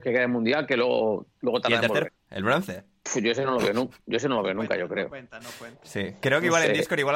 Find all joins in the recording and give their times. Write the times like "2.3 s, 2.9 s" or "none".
2.1 s